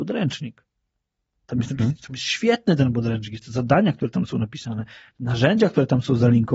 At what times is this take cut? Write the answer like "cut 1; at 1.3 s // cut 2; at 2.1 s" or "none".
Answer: none